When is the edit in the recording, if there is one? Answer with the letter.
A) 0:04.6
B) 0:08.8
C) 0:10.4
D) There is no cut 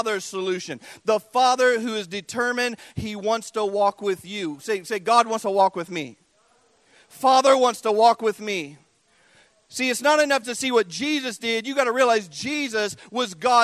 C